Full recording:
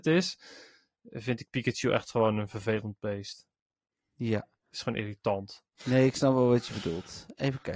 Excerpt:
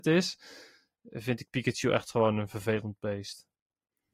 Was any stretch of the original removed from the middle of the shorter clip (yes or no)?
no